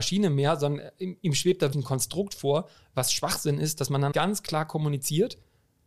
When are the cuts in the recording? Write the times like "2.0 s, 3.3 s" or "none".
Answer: 1.7 s, 4.1 s